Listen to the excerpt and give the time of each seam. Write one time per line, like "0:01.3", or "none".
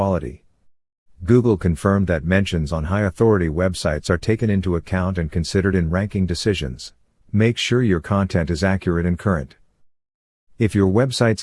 0:07.2